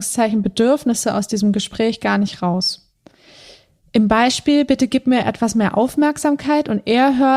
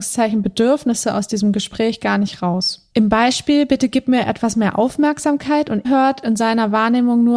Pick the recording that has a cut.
second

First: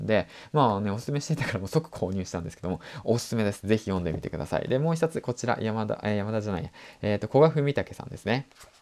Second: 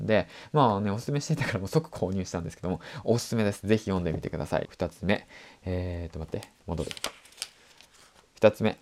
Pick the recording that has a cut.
second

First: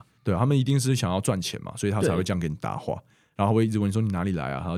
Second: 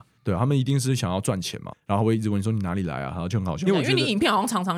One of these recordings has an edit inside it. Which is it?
second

